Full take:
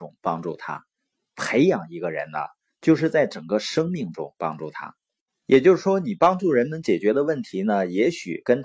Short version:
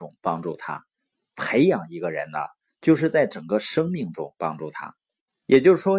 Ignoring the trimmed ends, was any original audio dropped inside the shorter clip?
no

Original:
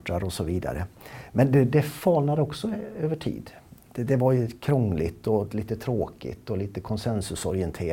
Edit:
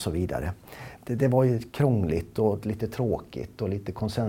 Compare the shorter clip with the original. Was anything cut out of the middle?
yes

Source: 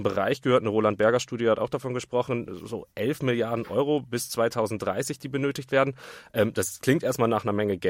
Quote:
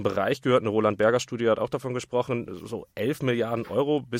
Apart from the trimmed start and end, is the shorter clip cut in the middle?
no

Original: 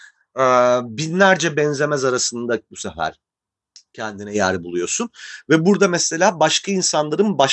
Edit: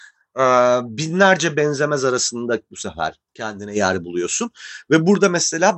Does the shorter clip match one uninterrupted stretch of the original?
no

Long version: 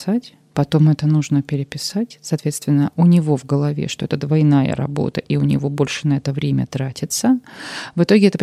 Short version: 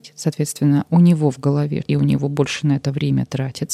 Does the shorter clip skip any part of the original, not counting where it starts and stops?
yes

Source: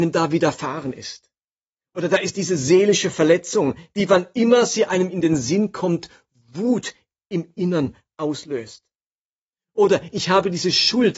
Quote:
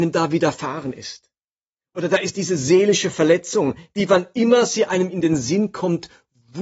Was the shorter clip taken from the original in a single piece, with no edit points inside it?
yes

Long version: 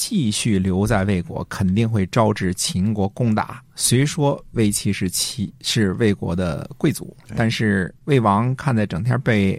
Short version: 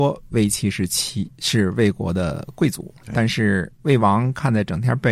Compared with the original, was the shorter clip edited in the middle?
no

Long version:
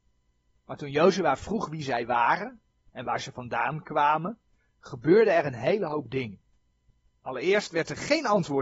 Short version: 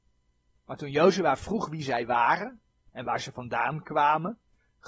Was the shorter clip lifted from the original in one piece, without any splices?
yes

